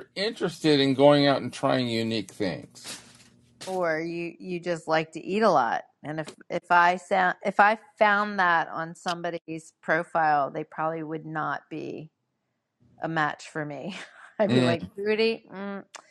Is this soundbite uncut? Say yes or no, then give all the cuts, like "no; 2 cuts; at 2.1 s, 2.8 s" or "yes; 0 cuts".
yes; 0 cuts